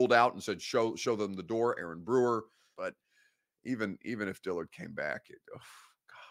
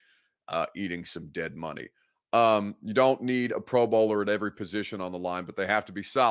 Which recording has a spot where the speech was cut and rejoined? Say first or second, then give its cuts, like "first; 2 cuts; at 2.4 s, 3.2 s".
first; 1 cut; at 2.7 s